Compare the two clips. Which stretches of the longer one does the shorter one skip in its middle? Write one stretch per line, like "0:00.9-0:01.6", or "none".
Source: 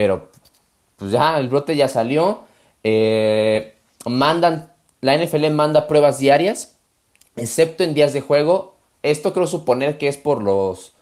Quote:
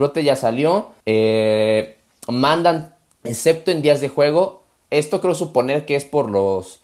0:02.5-0:02.8
0:04.9-0:07.3